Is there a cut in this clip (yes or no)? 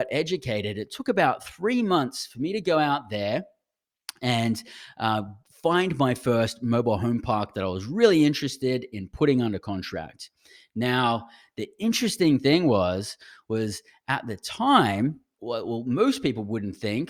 yes